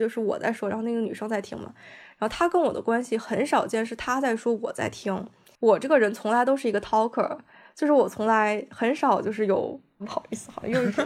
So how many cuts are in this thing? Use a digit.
1